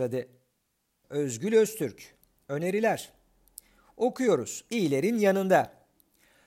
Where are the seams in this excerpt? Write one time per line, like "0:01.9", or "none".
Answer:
0:01.0

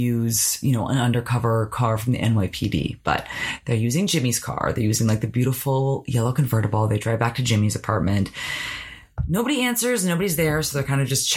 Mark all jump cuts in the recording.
none

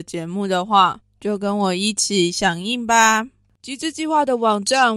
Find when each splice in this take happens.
0:01.0

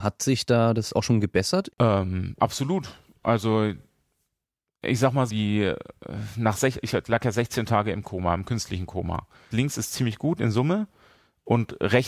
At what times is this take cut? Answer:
0:01.7
0:05.3
0:09.5

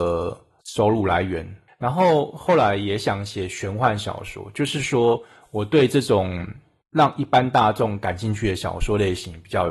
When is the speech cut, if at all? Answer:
0:01.7

